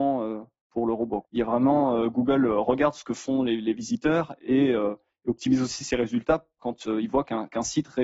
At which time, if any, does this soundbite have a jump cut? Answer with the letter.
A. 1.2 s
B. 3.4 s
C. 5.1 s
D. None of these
A